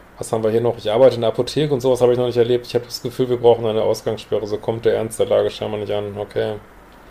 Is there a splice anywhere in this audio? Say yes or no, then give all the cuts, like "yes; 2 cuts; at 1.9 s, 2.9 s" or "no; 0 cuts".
no; 0 cuts